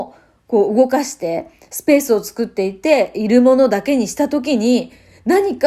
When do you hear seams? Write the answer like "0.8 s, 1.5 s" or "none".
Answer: none